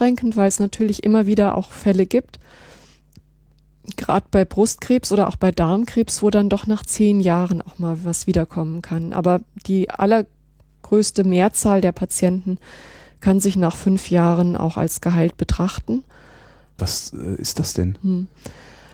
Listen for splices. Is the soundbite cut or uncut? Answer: cut